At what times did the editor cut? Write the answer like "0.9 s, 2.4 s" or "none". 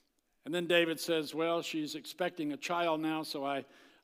none

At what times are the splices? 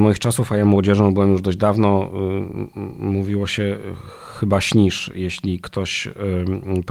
none

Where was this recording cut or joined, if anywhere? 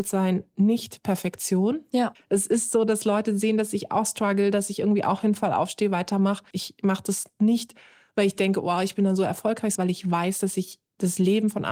2.2 s, 6.5 s, 9.8 s

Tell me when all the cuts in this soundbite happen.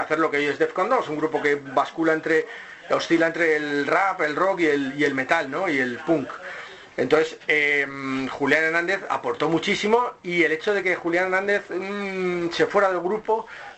none

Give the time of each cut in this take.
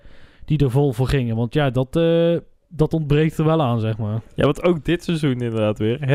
none

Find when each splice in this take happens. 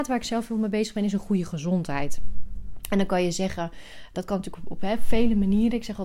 4.1 s

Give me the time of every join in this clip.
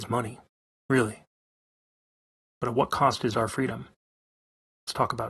2.5 s

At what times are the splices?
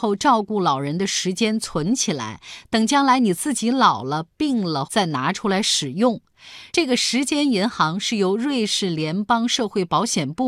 4.9 s, 6.7 s

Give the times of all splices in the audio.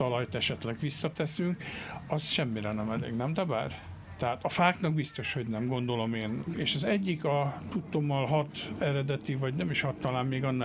6.5 s

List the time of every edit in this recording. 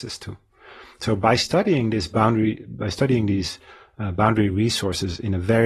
none

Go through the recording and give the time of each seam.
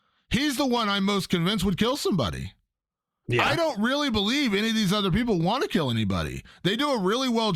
none

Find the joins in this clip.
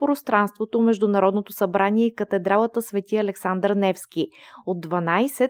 none

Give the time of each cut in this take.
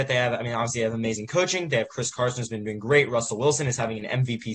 none

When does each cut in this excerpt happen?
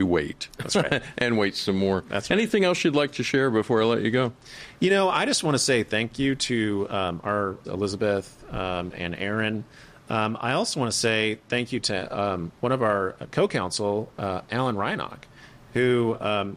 7.6 s

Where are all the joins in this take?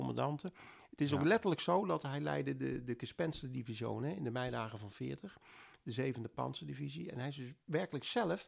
none

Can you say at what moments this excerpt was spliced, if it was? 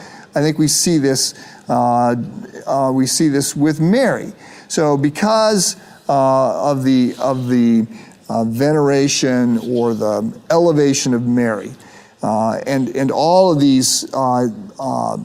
none

